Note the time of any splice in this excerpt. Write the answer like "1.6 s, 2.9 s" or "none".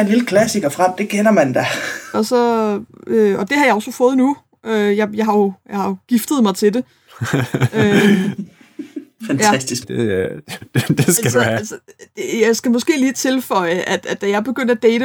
2.1 s, 9.8 s